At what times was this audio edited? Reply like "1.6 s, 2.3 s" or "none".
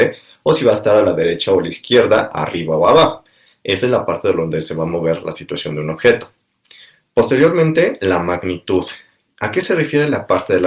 none